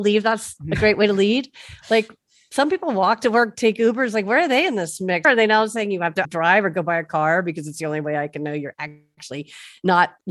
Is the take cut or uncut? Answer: cut